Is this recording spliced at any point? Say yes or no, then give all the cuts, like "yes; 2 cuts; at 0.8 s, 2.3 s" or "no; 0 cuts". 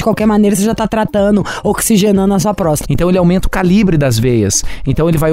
yes; 1 cut; at 2.8 s